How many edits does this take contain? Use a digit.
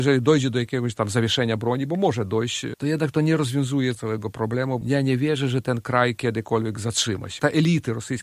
0